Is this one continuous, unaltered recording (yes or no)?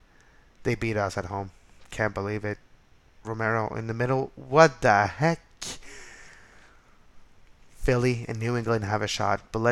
yes